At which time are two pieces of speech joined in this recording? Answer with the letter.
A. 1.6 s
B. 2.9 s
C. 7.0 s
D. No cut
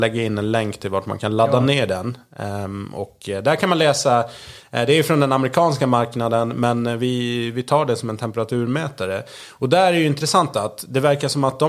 D